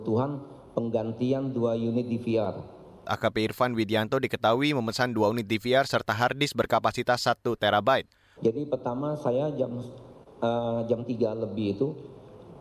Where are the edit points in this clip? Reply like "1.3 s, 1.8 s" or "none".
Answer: 3.0 s, 8.4 s